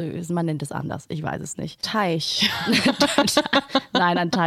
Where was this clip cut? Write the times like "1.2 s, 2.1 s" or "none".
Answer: none